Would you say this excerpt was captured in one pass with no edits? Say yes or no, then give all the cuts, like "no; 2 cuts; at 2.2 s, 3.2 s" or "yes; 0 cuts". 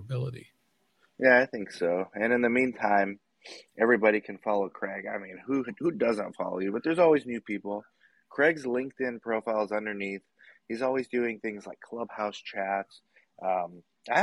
yes; 0 cuts